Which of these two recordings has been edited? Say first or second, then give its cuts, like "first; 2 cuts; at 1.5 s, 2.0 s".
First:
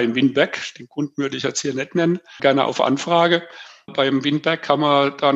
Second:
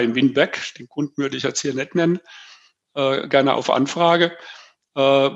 first; 2 cuts; at 2.4 s, 3.9 s